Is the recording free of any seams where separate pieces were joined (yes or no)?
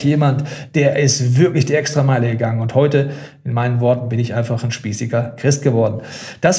yes